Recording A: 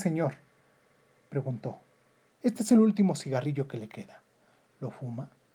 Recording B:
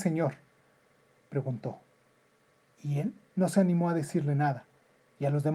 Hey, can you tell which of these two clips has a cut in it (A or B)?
A